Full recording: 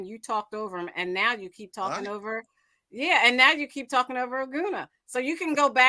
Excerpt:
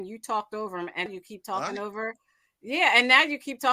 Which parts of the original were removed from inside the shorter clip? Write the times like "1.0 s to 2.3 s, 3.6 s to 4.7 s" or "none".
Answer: 1.1 s to 1.3 s